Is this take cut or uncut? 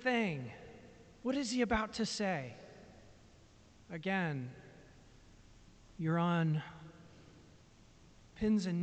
cut